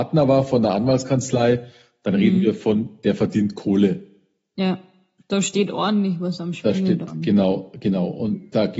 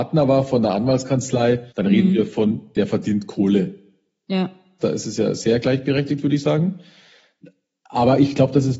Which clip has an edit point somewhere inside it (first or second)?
second